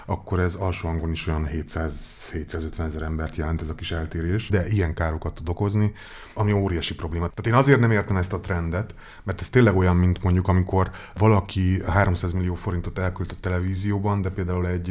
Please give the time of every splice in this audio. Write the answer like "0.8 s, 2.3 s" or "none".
4.5 s